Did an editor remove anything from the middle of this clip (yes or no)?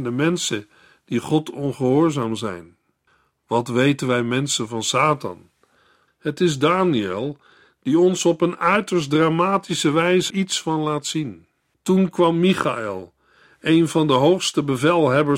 yes